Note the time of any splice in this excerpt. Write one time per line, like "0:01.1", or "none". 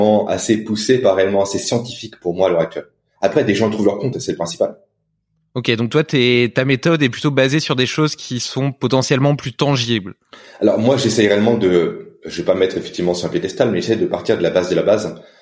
none